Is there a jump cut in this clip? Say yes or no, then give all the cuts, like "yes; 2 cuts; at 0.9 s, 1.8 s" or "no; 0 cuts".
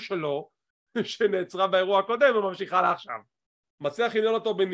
yes; 1 cut; at 3.6 s